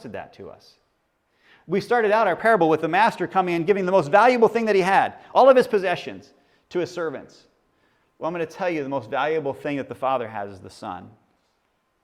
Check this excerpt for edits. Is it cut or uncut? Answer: uncut